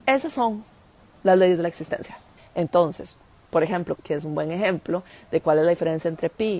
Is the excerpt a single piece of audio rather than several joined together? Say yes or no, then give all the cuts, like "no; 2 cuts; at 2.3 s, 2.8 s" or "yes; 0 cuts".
no; 2 cuts; at 2.4 s, 4.0 s